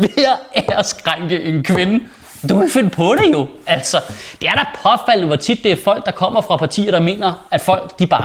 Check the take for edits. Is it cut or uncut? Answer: uncut